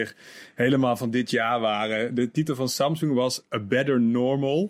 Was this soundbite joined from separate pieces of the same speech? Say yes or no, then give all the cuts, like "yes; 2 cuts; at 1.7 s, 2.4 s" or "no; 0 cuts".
no; 0 cuts